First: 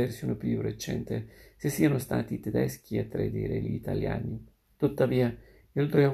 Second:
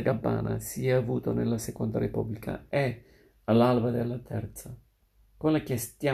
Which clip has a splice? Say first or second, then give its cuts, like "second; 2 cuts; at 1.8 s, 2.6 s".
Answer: first; 1 cut; at 4.6 s